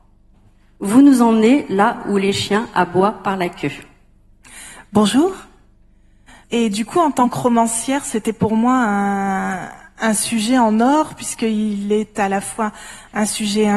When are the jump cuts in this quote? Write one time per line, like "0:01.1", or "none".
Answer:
0:06.4